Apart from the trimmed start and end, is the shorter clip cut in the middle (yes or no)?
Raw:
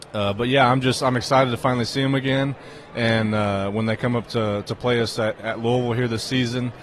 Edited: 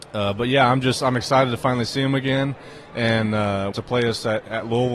yes